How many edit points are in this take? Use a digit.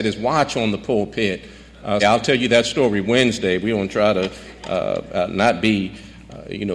1